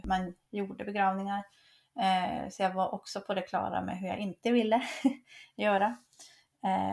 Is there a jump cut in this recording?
no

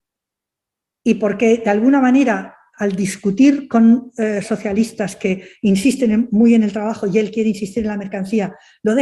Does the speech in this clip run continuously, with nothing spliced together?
no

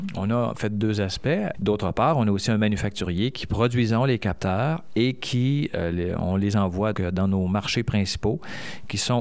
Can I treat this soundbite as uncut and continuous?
no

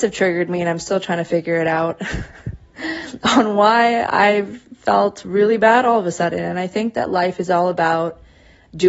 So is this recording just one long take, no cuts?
yes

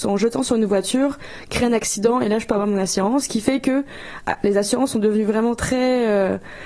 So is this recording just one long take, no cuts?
yes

